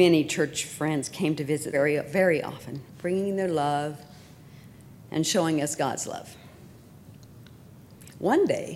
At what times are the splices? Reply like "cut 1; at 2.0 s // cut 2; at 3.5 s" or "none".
cut 1; at 1.7 s // cut 2; at 2.9 s